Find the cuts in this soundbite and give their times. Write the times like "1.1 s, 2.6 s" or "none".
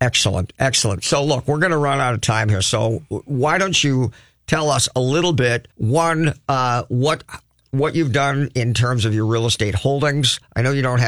5.7 s

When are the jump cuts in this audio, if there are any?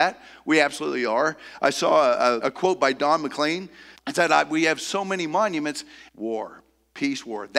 2.4 s, 3.9 s, 6.1 s

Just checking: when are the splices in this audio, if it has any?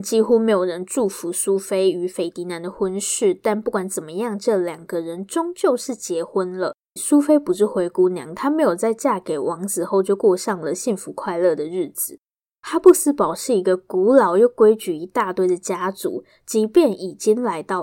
7.0 s

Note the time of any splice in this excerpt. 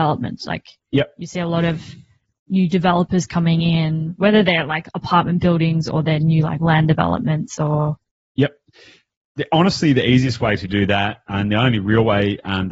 none

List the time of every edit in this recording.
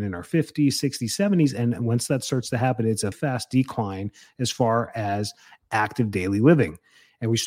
3.1 s

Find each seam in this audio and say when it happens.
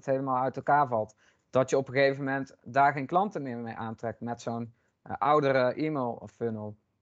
none

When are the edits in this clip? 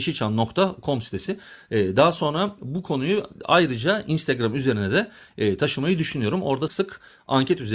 6.7 s

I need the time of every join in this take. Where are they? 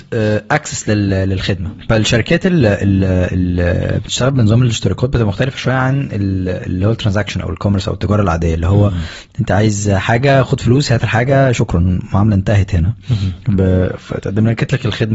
none

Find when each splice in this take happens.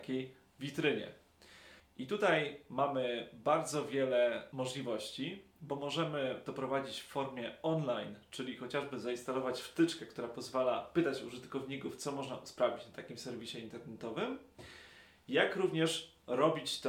1.8 s

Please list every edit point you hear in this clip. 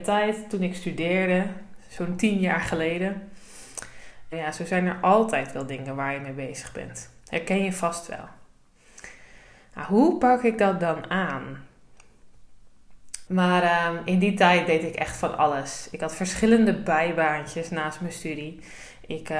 4.3 s, 13.3 s

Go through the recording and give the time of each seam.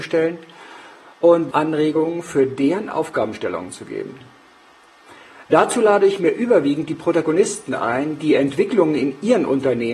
1.5 s

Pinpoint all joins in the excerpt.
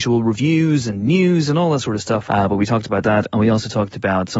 2.3 s

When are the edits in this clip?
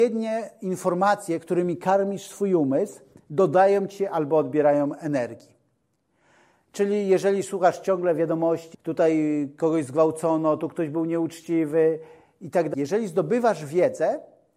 8.7 s, 12.7 s

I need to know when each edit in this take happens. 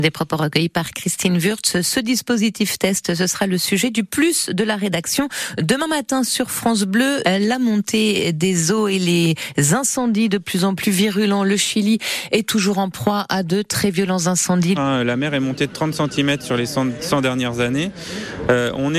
7.2 s, 14.8 s

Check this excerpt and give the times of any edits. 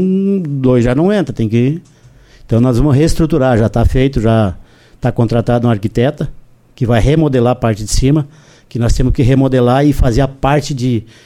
none

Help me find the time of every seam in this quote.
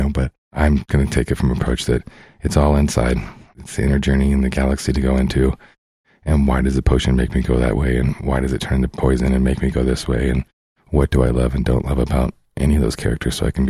none

